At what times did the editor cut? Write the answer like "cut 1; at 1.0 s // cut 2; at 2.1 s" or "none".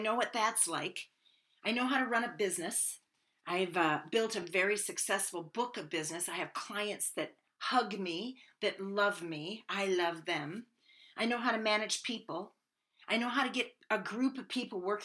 none